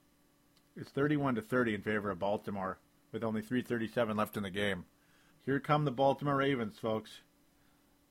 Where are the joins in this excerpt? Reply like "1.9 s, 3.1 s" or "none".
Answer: 5.3 s